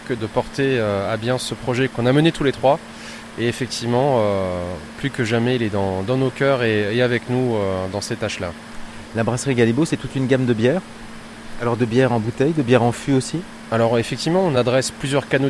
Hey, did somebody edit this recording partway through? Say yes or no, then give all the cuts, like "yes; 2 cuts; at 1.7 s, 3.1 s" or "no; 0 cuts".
no; 0 cuts